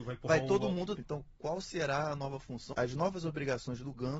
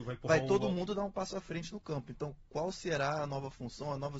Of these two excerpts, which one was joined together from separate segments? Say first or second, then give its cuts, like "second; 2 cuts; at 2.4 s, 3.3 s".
first; 2 cuts; at 0.9 s, 2.7 s